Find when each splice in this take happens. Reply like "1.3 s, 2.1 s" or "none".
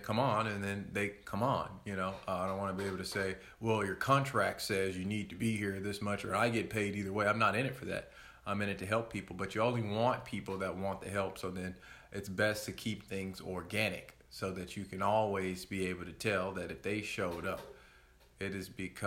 none